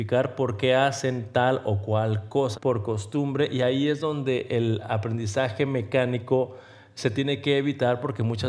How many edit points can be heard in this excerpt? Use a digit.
1